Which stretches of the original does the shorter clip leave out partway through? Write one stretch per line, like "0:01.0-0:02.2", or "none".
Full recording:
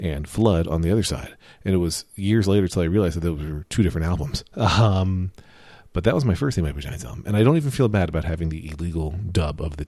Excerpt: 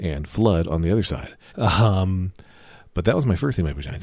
0:01.5-0:04.5